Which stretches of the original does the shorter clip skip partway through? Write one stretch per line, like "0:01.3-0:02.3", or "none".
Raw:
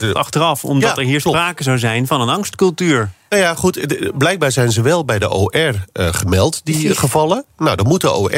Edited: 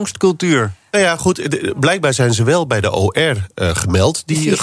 none